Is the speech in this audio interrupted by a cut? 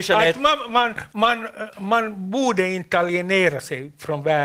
no; 0 cuts

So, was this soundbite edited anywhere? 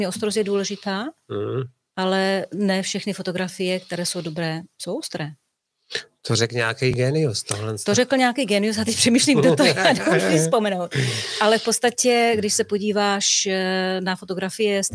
no; 0 cuts

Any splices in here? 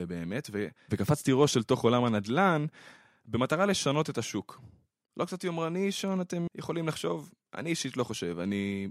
yes; 1 cut; at 6.5 s

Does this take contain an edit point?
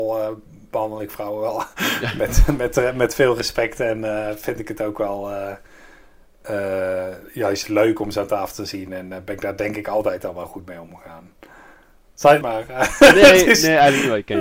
yes; 1 cut; at 12.4 s

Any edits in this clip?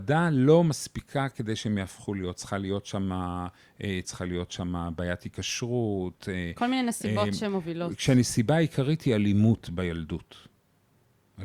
yes; 1 cut; at 4.0 s

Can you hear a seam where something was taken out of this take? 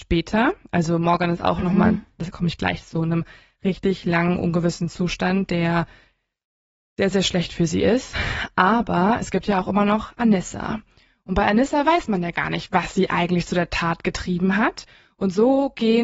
no; 0 cuts

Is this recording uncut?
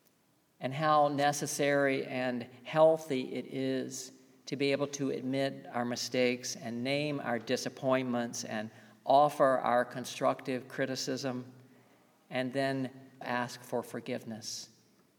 no; 1 cut; at 13.2 s

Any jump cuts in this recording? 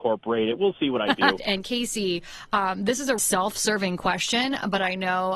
yes; 2 cuts; at 1.4 s, 3.2 s

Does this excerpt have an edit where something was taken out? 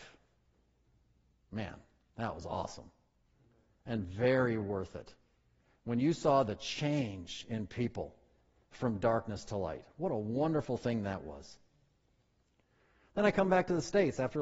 no; 0 cuts

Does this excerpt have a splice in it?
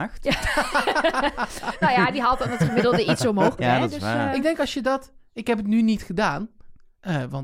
yes; 1 cut; at 3.6 s

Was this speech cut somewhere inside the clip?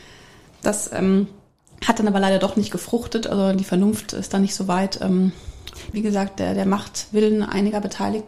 yes; 1 cut; at 5.9 s

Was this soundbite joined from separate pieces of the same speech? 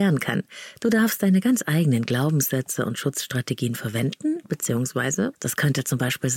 yes; 1 cut; at 5.3 s

